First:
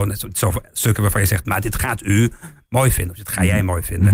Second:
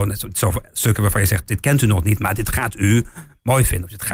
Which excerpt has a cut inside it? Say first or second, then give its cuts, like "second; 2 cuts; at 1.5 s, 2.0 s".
first; 1 cut; at 1.4 s